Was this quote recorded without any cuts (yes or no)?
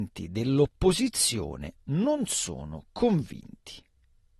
yes